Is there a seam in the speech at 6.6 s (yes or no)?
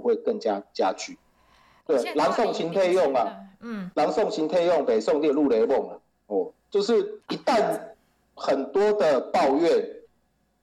no